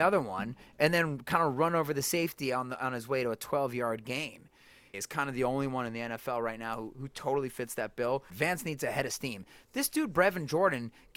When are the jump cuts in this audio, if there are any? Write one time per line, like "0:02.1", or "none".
0:04.9
0:08.3